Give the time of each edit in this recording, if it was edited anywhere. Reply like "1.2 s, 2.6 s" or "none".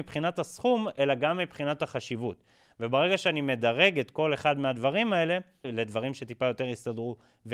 5.6 s